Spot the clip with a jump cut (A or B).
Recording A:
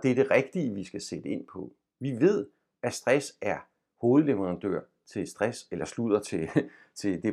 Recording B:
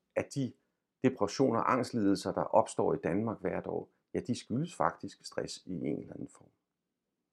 A